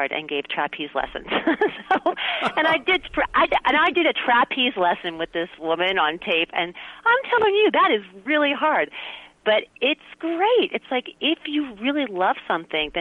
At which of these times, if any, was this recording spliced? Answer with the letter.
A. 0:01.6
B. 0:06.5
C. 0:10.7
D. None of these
D